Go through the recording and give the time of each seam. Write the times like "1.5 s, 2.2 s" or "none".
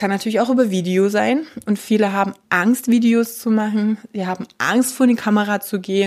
none

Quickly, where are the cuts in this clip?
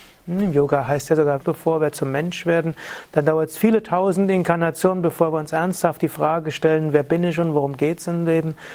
1.4 s

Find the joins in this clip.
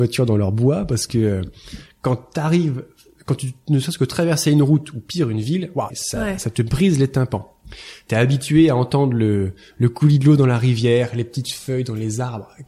5.9 s

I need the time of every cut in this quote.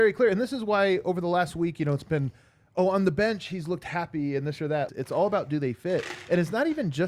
4.9 s

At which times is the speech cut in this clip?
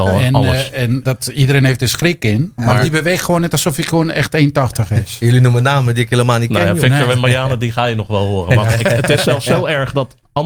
1.0 s, 2.6 s

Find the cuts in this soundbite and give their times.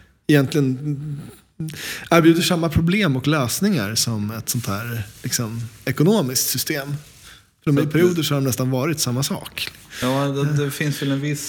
none

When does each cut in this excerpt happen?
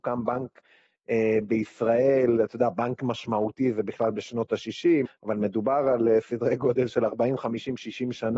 5.1 s

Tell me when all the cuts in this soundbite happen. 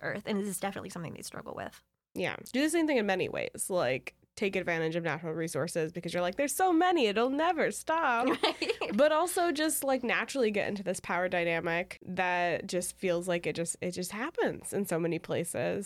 none

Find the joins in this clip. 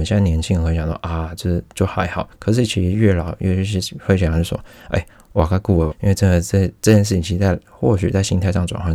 5.9 s

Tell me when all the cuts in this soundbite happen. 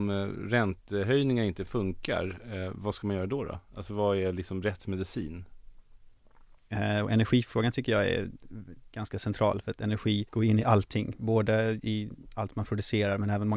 6.7 s, 10.3 s

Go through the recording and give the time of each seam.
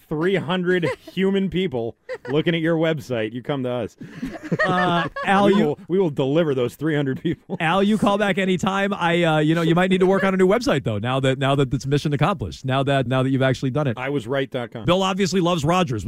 13.1 s, 14.8 s

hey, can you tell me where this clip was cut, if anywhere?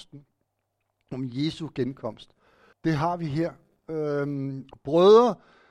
2.7 s, 4.7 s

